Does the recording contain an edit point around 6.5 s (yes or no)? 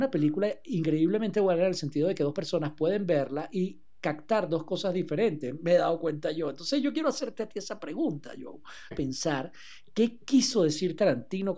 no